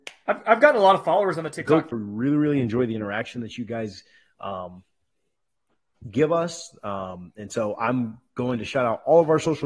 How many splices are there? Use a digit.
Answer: 1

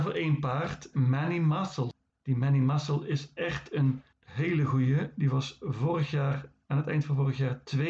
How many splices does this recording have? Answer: 1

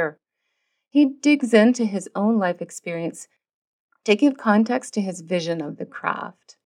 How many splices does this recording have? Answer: 0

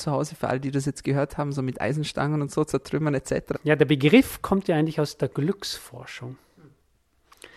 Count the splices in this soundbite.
1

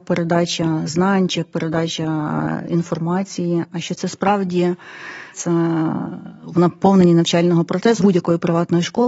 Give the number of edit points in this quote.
2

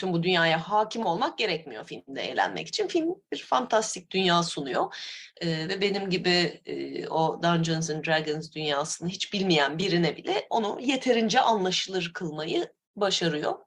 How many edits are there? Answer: 0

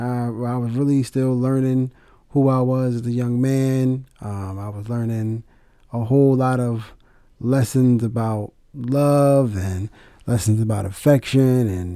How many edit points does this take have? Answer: 0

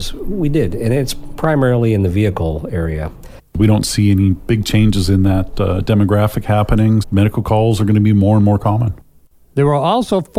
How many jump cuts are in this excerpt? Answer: 2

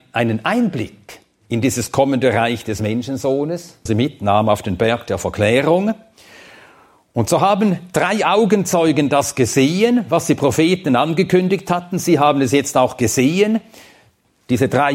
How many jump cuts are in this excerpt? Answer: 1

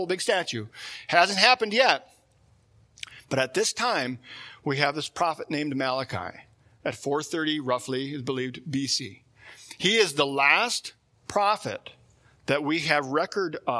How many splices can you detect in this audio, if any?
0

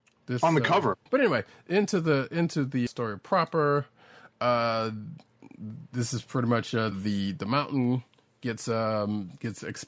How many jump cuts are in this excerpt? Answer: 3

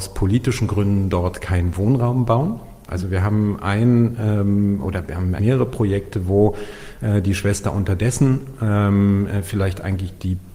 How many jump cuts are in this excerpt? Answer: 2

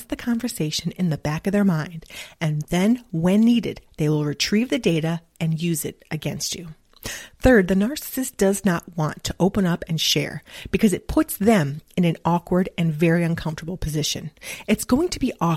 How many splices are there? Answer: 0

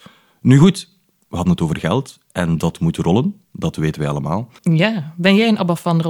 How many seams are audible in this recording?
1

